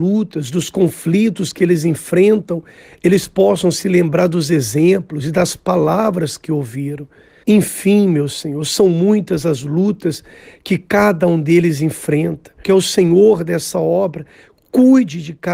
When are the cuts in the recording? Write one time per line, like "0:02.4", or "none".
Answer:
0:07.4
0:12.6